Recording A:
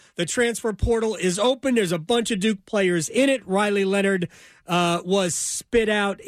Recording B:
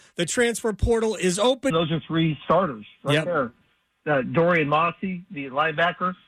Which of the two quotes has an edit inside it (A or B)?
B